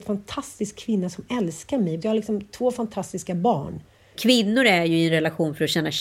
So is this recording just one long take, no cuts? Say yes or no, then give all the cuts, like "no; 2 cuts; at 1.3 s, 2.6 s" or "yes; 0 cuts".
no; 2 cuts; at 2.0 s, 4.1 s